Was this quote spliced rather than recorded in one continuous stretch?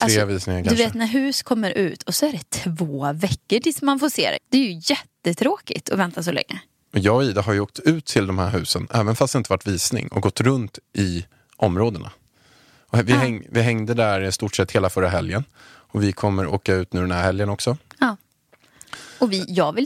yes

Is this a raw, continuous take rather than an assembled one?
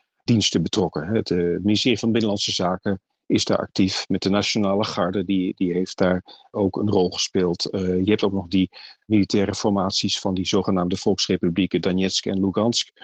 yes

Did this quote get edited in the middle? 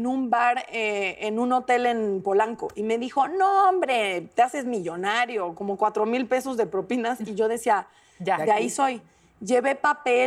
no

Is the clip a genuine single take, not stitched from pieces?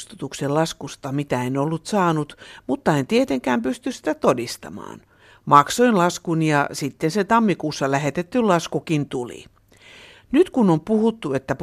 yes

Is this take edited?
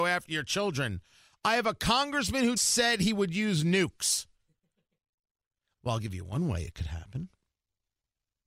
yes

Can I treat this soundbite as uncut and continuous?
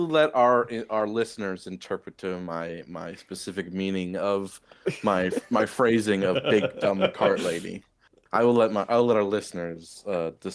yes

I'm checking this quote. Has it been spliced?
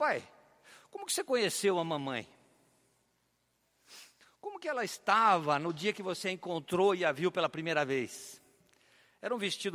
no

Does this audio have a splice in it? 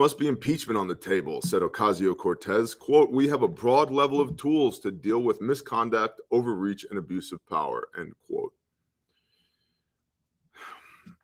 no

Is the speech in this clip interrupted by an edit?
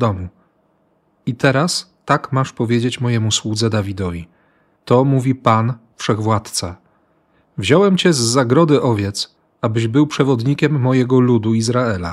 no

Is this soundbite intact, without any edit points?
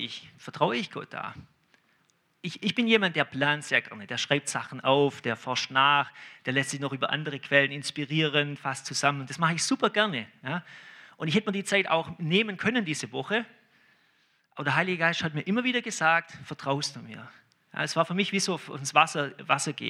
yes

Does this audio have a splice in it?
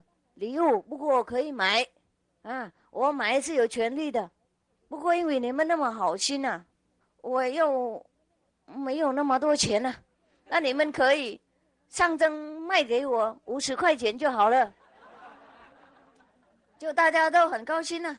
yes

